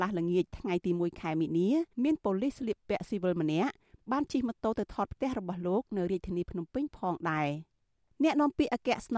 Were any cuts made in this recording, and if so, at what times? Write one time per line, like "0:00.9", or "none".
0:01.9

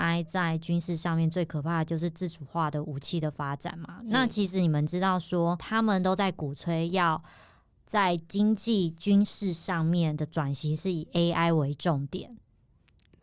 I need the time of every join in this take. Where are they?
0:05.6

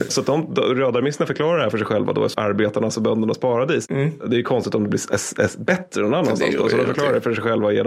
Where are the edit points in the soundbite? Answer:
0:02.3

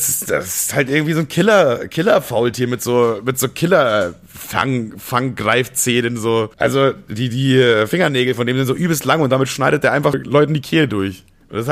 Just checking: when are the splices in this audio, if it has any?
0:06.5
0:10.1

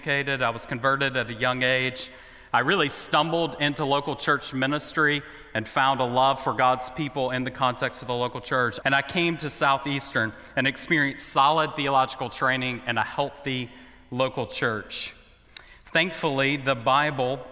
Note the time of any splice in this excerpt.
0:08.8

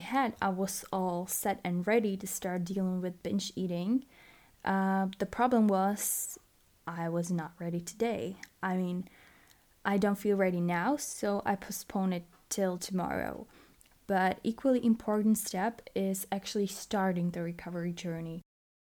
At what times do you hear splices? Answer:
0:13.9

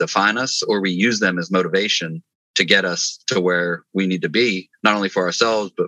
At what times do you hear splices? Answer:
none

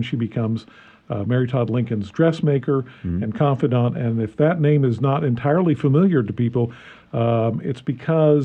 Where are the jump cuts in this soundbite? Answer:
none

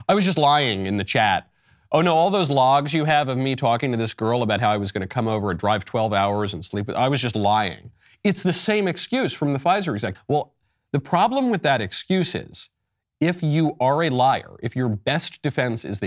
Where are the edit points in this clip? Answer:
0:10.1

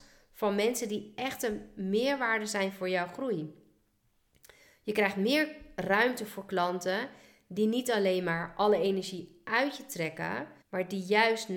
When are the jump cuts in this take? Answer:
0:10.6

